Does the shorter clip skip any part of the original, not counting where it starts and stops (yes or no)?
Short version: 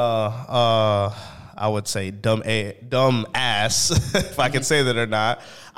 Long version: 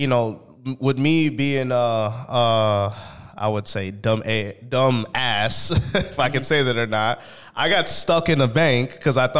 no